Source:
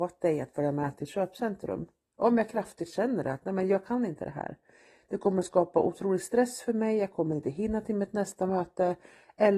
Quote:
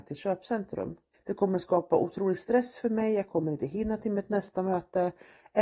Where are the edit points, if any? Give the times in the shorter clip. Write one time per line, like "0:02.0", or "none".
0:01.1